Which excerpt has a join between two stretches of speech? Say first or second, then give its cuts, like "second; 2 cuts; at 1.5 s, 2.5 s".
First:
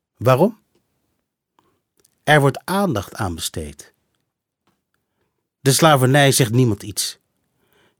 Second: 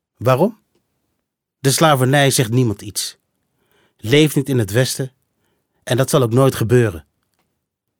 second; 1 cut; at 1.5 s